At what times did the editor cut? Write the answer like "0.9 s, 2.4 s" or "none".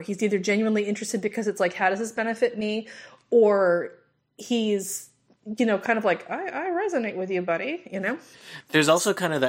none